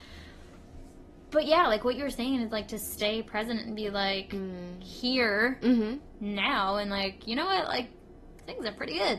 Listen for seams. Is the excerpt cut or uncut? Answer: uncut